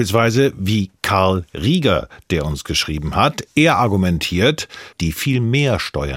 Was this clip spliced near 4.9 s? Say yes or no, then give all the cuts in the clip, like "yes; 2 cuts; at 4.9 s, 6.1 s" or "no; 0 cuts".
yes; 1 cut; at 4.9 s